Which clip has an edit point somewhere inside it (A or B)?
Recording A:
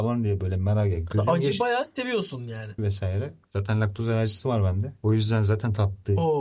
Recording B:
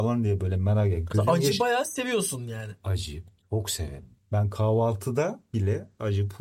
A